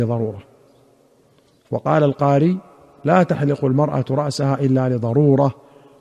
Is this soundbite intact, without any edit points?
yes; 0 cuts

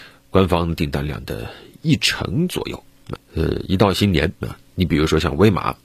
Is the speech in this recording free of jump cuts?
no; 2 cuts; at 3.2 s, 4.4 s

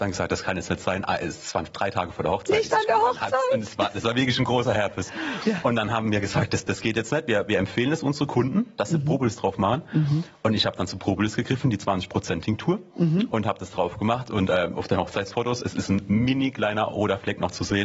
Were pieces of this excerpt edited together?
no; 0 cuts

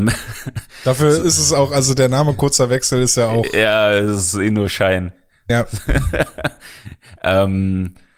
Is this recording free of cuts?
yes; 0 cuts

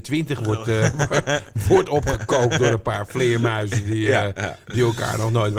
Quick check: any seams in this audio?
no; 0 cuts

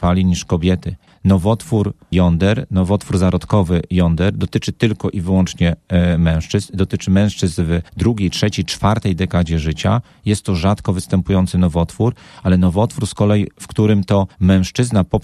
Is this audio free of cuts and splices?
yes; 0 cuts

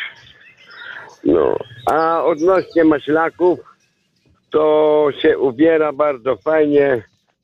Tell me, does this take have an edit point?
no; 0 cuts

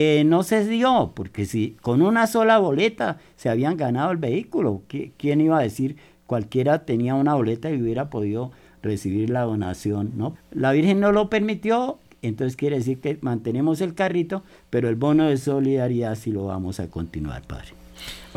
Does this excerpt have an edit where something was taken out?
yes; 1 cut; at 10.4 s

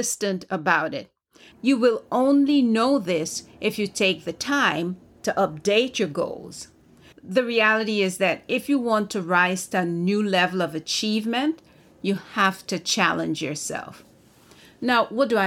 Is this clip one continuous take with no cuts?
no; 2 cuts; at 1.5 s, 7.1 s

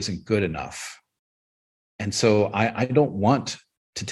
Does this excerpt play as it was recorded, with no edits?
yes; 0 cuts

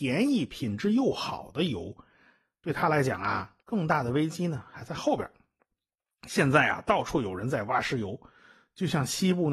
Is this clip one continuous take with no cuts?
no; 1 cut; at 3.6 s

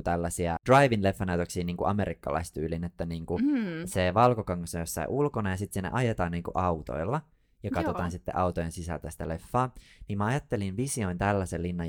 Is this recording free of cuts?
yes; 0 cuts

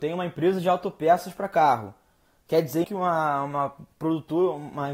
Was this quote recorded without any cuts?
no; 1 cut; at 2.8 s

